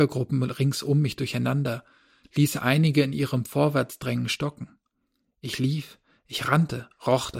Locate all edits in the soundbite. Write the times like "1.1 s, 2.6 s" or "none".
none